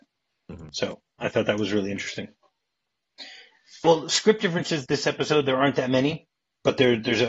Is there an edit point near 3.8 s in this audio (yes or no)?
yes